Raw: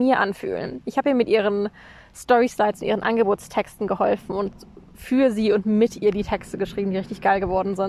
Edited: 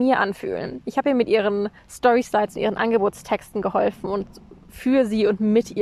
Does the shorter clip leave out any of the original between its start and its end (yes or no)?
yes